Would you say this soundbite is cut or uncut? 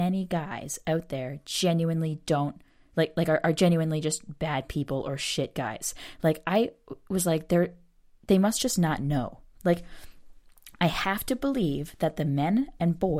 uncut